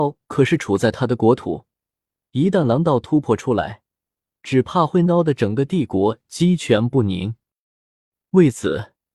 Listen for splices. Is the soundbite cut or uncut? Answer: uncut